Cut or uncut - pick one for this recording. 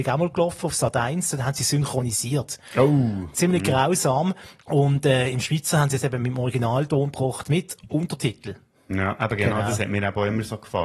uncut